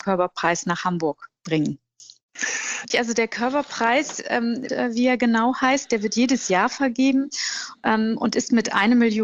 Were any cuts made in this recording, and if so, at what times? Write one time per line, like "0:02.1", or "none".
0:02.9
0:04.7